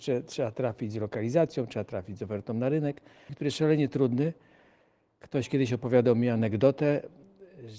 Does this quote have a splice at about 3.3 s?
yes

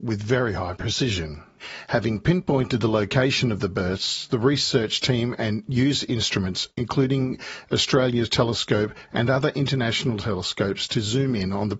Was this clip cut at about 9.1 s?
yes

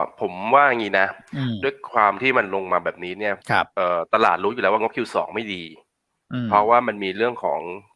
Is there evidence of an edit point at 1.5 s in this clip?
no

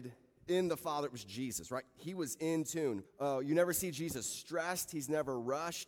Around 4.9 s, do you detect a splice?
no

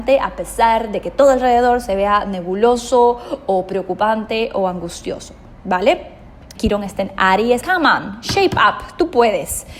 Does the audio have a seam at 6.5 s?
yes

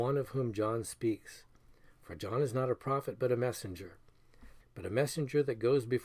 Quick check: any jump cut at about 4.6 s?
yes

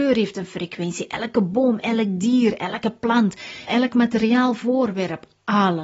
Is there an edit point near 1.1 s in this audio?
no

